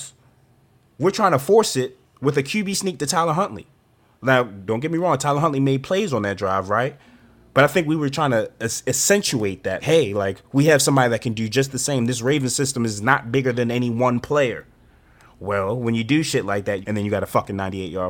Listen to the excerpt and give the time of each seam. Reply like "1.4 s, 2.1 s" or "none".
9.8 s, 16.8 s